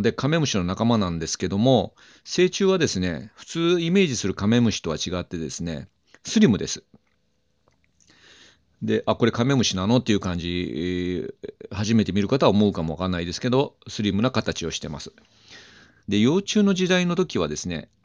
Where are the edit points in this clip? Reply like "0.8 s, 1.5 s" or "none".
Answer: 16.0 s